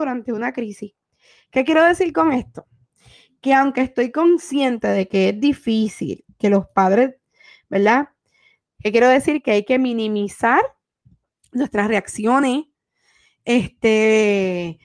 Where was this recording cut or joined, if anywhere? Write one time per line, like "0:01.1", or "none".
0:08.7

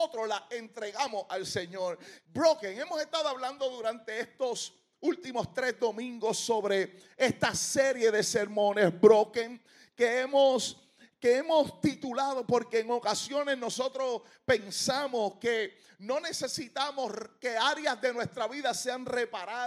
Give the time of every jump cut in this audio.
0:02.2

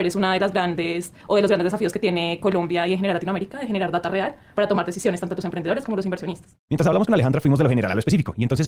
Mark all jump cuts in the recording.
none

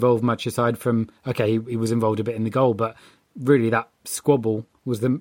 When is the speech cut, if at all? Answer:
none

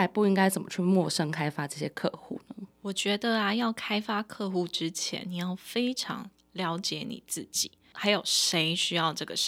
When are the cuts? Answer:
0:02.7

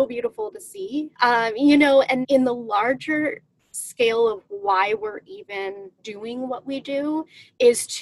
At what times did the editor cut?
0:01.1
0:02.2
0:06.0

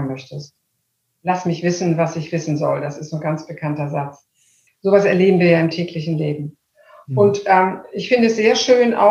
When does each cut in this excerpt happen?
0:04.7

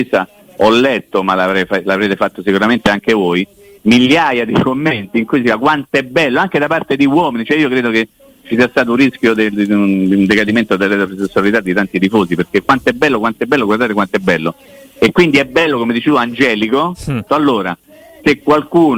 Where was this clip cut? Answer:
0:17.3

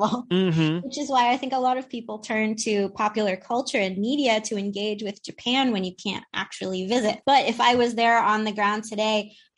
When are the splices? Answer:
0:07.2

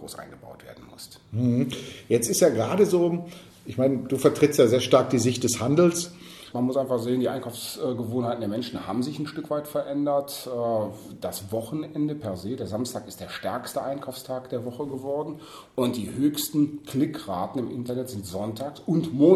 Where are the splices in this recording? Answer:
0:06.5

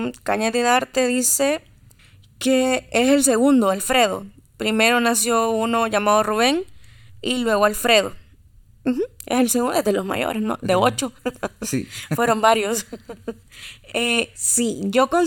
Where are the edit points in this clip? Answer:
none

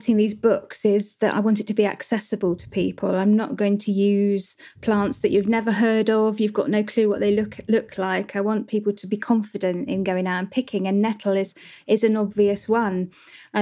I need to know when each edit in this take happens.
none

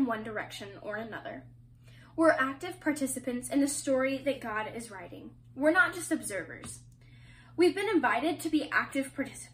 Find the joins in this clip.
none

